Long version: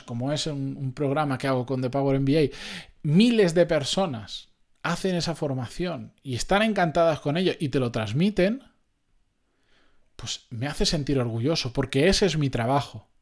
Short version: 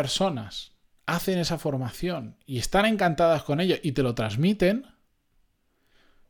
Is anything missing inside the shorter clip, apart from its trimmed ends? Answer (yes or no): no